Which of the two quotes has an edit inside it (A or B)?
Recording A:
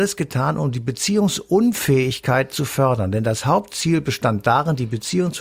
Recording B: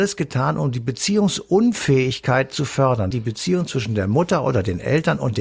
B